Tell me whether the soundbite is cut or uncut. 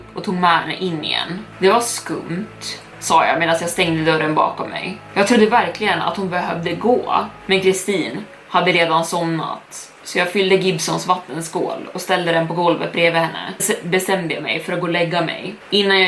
uncut